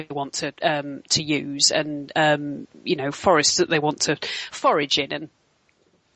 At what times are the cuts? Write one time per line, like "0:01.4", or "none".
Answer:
none